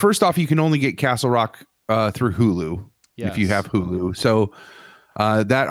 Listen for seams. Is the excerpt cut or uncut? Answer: uncut